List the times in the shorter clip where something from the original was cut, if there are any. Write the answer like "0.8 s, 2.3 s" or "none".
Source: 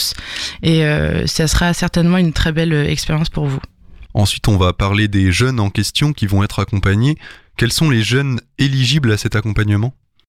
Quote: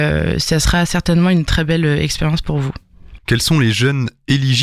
3.2 s